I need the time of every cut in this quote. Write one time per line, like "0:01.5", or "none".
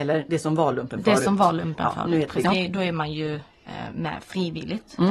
0:02.4